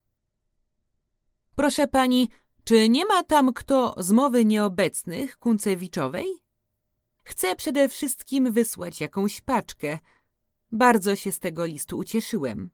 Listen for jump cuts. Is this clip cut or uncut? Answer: cut